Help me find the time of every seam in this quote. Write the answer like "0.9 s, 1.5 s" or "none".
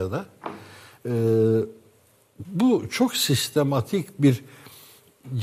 none

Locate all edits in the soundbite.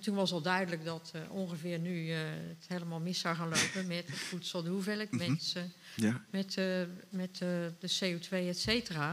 none

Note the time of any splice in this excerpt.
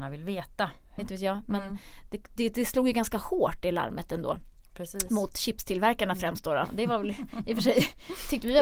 1.0 s

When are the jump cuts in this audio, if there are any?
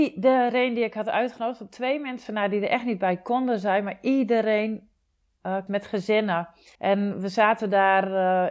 5.7 s, 6.8 s

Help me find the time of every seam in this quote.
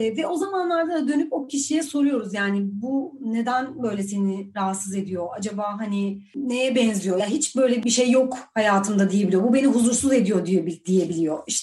none

